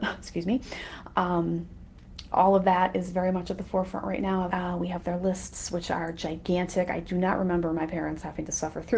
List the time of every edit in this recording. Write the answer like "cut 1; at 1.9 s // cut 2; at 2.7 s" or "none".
cut 1; at 4.5 s